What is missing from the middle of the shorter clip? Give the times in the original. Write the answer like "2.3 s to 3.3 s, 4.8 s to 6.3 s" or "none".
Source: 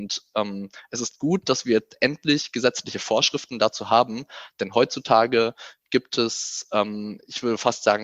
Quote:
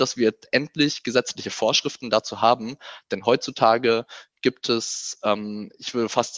none